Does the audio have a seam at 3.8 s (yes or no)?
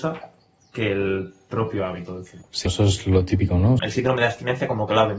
yes